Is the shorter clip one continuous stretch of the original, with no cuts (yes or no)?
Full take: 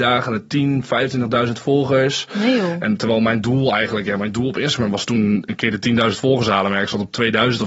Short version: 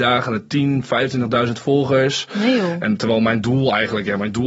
yes